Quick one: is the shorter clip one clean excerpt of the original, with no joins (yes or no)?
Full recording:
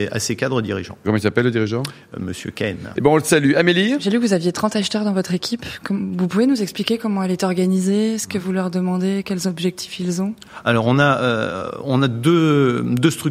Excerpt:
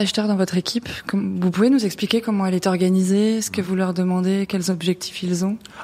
yes